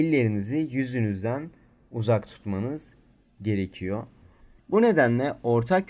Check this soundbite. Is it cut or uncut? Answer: cut